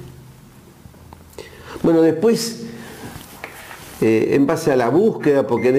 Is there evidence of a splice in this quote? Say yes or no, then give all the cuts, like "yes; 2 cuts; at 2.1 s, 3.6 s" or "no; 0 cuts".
no; 0 cuts